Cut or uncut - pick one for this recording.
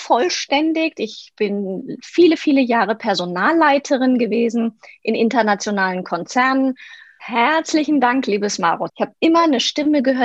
cut